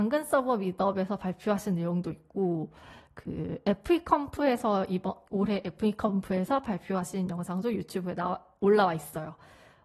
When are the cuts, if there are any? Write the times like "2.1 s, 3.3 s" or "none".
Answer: 5.3 s